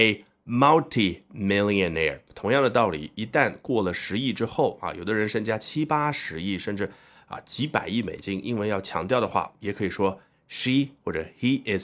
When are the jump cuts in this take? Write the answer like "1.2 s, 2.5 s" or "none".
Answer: none